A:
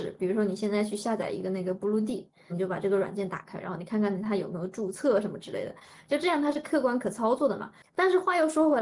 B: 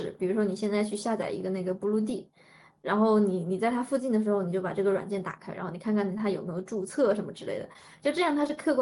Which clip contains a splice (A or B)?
A